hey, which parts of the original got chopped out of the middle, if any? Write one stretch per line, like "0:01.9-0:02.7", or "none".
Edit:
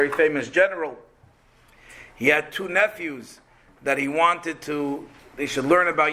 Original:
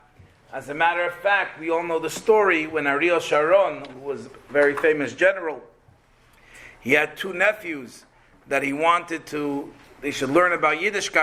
none